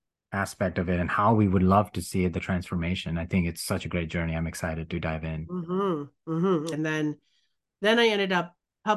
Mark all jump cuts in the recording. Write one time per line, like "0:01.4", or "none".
0:06.7